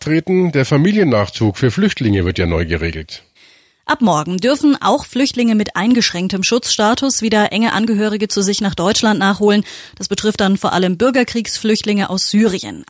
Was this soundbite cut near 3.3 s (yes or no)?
no